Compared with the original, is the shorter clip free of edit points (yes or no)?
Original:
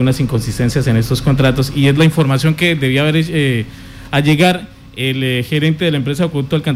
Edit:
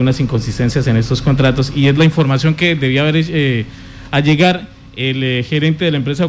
yes